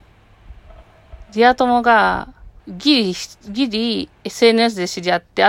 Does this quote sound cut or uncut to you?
cut